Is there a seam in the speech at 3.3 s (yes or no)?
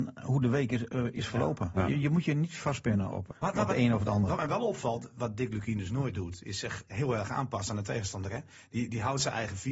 yes